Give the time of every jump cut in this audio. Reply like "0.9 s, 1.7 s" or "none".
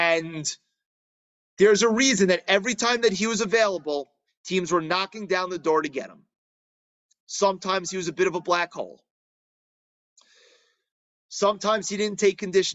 7.1 s